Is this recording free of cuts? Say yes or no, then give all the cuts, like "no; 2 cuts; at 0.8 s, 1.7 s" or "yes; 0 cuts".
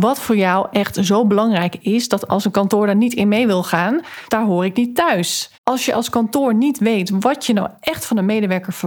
no; 2 cuts; at 4.3 s, 5.5 s